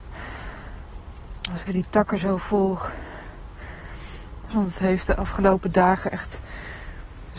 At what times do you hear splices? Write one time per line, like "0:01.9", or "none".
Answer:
0:01.7
0:04.5